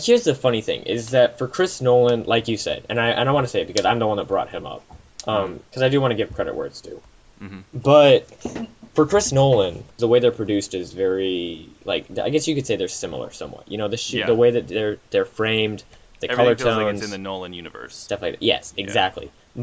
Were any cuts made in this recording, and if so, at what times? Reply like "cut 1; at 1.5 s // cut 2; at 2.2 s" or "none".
cut 1; at 10.0 s

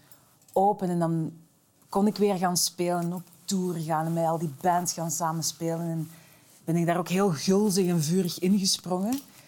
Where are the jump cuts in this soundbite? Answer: none

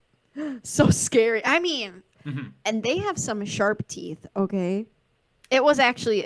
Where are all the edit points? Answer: cut 1; at 2.2 s

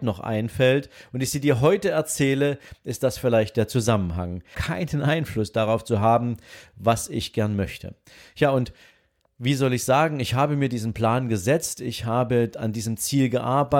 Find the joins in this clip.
cut 1; at 4.5 s

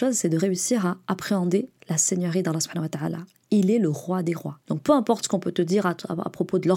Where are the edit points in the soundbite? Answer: cut 1; at 4.6 s

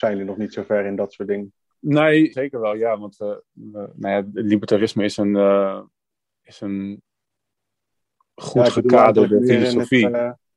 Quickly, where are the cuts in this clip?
cut 1; at 2.3 s

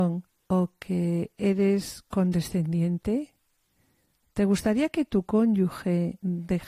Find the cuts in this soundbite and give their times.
cut 1; at 4.2 s

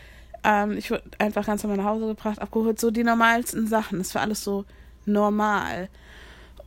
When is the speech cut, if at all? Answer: none

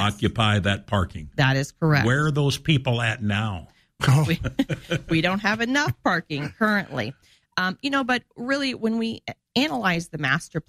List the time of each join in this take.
cut 1; at 4.0 s

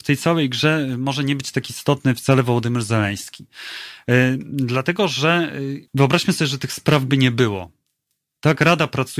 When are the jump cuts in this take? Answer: cut 1; at 5.9 s

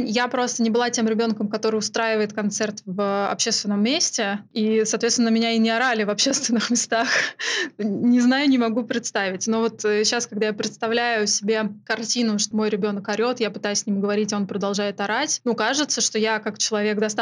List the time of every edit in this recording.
cut 1; at 12.5 s

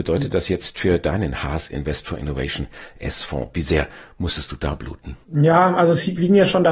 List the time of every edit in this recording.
cut 1; at 5.2 s

